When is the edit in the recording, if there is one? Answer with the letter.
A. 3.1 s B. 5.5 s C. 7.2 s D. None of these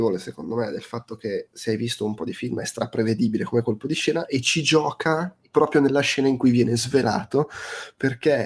D